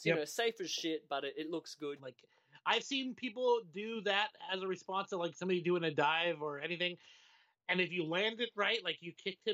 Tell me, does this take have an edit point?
yes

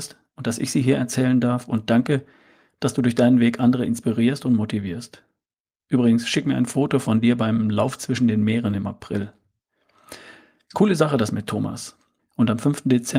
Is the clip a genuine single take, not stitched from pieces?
no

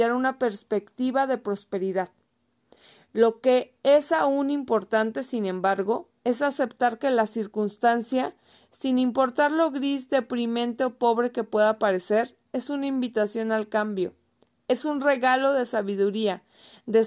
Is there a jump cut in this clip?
no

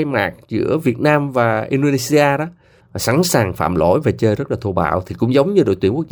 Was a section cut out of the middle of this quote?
yes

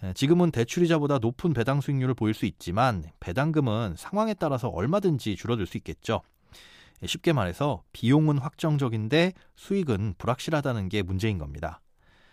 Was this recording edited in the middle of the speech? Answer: no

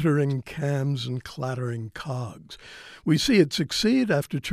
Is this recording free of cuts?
yes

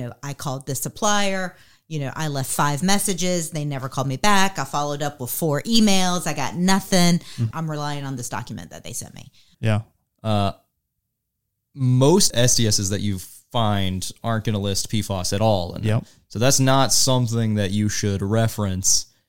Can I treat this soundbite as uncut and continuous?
no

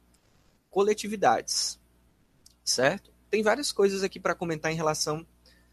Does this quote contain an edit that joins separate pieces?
no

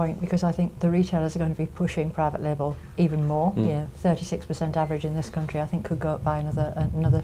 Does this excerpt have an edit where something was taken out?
no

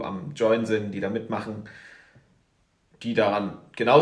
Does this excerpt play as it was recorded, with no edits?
yes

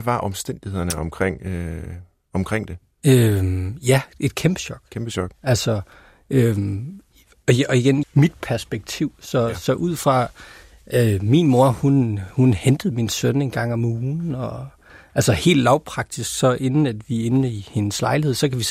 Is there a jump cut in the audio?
yes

